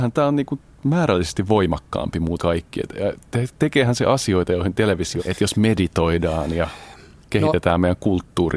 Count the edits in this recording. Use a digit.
2